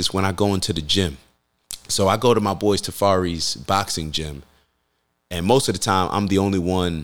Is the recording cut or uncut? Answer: uncut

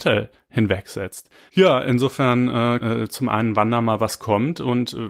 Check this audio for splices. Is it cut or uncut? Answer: cut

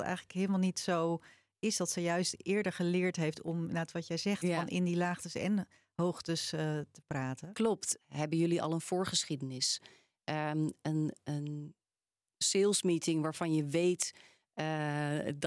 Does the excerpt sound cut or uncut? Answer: cut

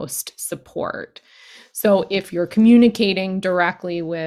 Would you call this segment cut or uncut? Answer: uncut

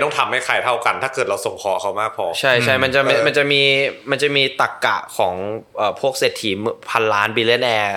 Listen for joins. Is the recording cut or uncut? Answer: uncut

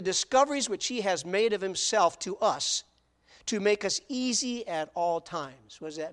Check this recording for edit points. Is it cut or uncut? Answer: uncut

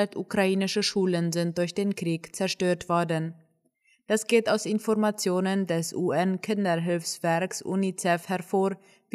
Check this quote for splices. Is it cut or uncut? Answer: uncut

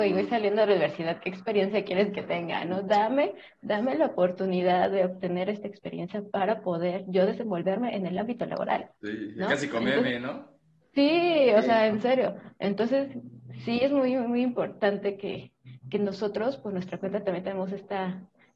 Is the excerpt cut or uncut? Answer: cut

